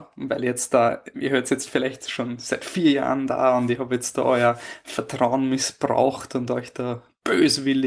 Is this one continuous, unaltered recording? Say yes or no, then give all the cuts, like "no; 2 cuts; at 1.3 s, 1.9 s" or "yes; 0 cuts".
no; 1 cut; at 1.1 s